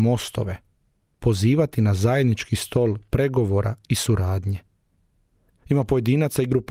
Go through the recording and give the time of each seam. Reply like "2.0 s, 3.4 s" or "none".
5.5 s